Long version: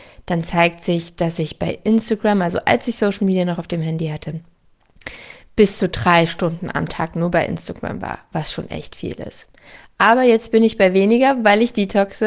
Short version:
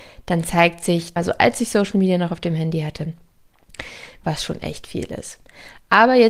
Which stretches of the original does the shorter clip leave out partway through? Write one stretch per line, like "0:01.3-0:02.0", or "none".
0:01.2-0:02.4
0:05.5-0:08.3

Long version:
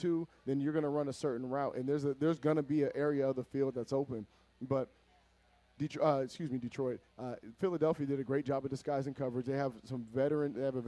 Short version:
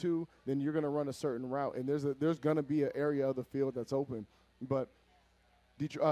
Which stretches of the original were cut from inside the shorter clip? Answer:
none

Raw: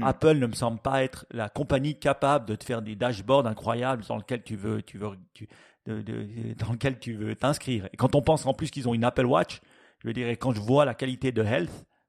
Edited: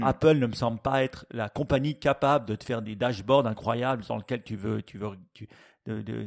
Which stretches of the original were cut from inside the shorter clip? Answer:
none

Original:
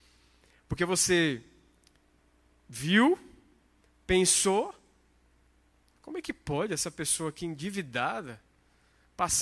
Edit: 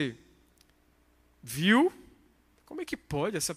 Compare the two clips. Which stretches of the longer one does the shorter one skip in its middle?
0:03.9-0:06.0

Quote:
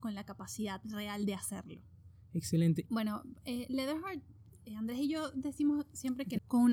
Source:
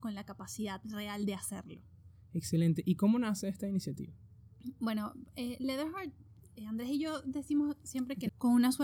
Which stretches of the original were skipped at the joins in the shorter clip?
0:02.8-0:04.8

